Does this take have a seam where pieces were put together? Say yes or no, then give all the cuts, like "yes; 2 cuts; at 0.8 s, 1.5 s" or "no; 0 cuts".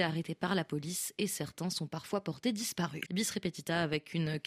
yes; 1 cut; at 3.1 s